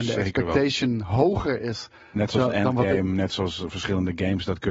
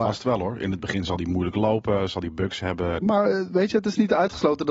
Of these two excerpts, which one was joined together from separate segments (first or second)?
second